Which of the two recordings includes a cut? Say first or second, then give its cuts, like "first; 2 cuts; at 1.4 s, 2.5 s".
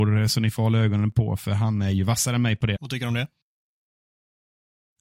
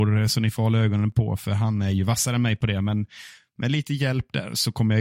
first; 1 cut; at 2.7 s